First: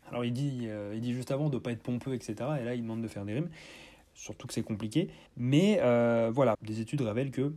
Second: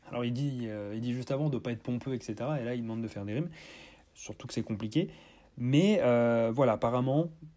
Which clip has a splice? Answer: first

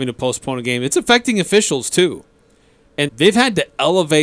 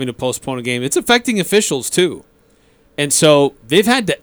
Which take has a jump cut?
first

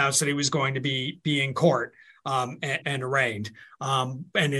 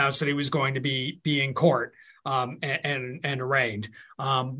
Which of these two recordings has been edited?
first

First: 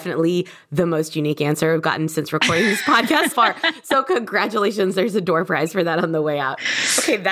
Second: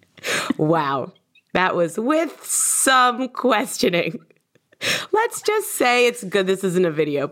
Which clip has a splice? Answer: first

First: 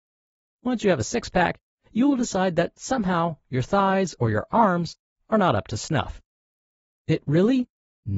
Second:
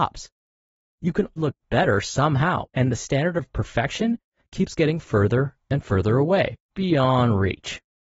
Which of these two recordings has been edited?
second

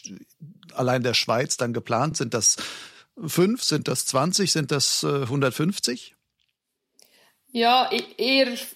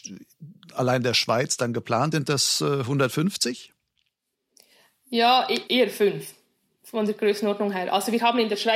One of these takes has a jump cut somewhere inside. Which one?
second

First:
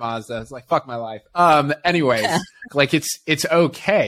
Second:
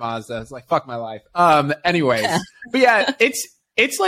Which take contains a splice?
first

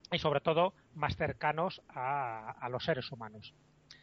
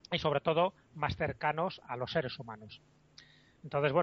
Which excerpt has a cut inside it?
second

